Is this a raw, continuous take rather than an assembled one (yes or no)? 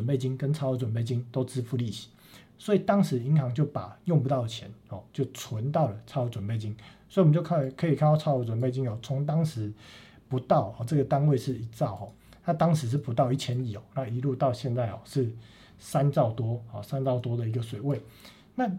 yes